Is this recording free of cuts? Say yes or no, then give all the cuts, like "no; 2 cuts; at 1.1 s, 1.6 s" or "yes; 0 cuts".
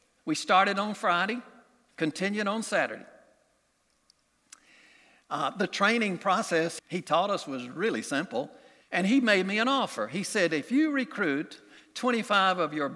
no; 2 cuts; at 6.8 s, 8.8 s